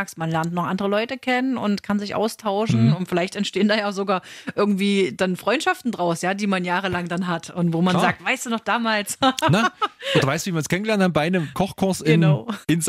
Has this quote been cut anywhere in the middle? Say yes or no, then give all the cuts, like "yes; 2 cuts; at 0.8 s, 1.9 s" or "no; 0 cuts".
no; 0 cuts